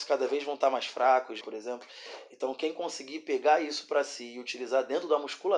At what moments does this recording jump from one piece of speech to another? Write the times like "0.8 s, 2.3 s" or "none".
1.4 s